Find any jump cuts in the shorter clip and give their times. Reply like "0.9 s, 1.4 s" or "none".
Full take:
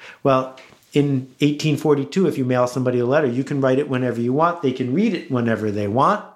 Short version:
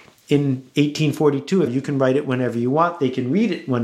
1.7 s